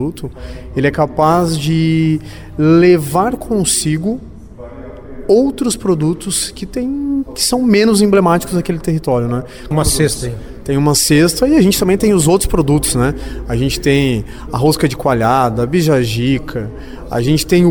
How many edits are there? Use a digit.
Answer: 1